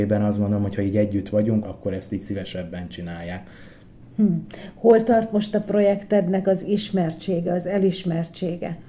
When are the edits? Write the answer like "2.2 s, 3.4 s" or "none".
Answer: 1.6 s

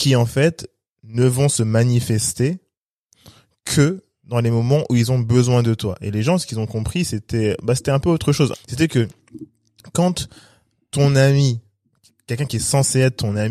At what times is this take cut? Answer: 8.5 s

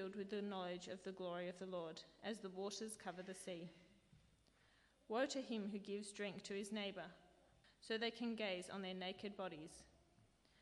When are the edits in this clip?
7.6 s

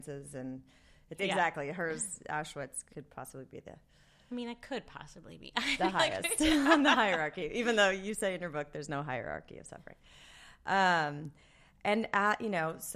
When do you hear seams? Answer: 1.2 s

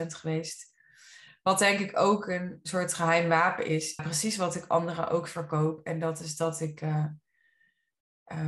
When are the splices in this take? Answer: 4.0 s

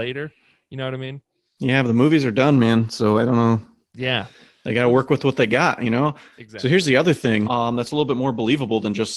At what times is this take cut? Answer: 7.4 s

